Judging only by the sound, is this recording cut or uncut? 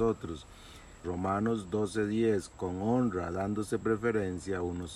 cut